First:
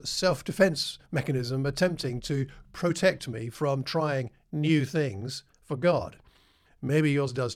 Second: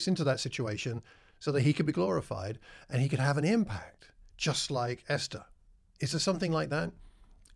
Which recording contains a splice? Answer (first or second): first